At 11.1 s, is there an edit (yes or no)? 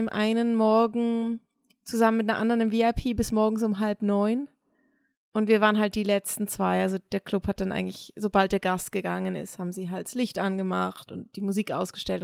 yes